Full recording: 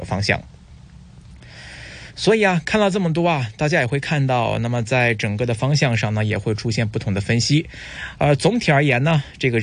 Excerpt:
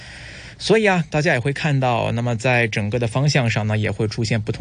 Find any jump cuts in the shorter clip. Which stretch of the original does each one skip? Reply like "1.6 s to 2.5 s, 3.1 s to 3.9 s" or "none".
2.6 s to 3.5 s